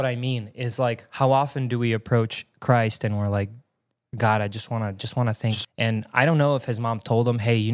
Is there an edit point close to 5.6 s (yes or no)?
yes